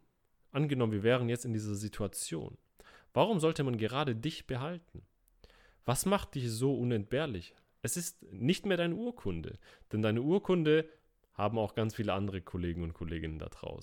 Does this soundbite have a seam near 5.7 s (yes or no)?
no